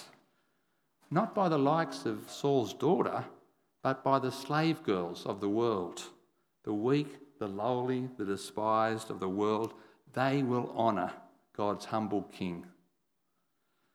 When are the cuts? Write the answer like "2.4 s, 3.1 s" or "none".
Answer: 2.3 s